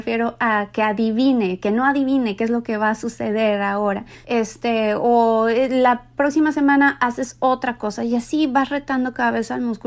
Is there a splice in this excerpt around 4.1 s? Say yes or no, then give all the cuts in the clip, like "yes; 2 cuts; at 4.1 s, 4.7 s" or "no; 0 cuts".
yes; 1 cut; at 4.1 s